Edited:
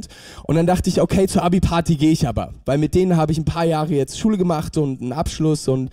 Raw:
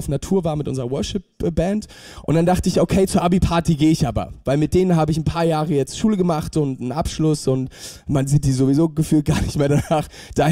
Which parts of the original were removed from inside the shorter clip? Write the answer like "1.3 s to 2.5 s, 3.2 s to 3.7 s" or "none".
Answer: none